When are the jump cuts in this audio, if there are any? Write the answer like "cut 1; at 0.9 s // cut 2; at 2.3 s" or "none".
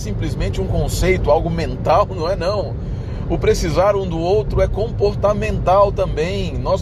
none

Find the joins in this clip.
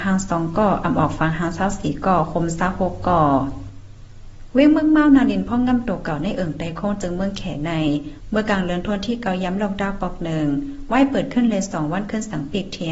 none

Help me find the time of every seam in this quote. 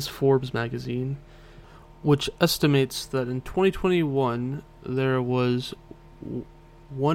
none

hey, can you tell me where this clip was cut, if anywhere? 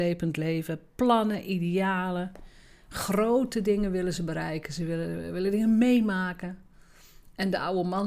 none

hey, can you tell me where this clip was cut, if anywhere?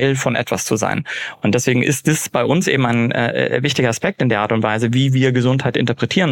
none

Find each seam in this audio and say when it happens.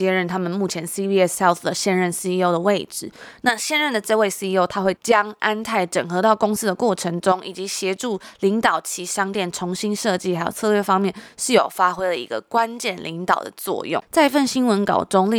cut 1; at 5.0 s

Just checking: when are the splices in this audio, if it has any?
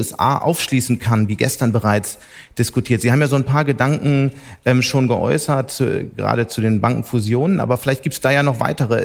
none

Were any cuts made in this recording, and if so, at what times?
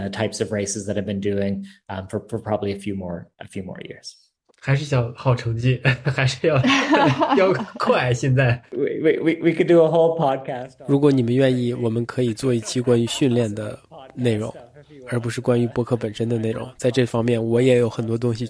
none

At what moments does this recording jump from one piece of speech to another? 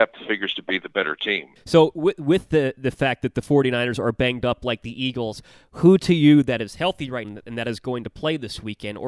cut 1; at 1.6 s // cut 2; at 7.2 s

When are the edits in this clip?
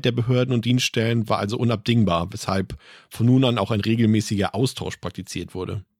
none

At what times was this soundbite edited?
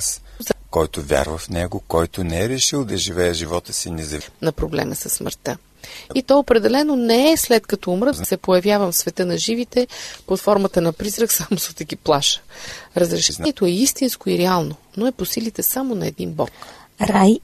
none

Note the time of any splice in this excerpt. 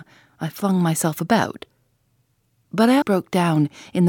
cut 1; at 3.0 s

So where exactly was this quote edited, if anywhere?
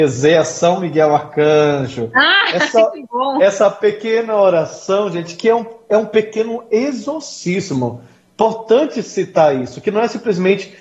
none

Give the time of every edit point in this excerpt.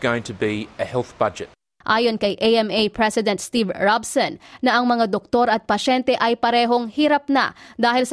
cut 1; at 1.8 s

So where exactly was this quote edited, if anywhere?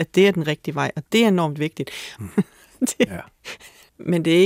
cut 1; at 2.2 s

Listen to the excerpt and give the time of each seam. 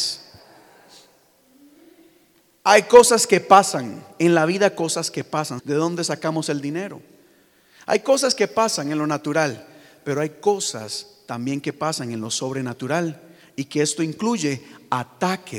cut 1; at 5.6 s

